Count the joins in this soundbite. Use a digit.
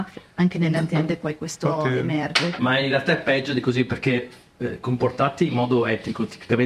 1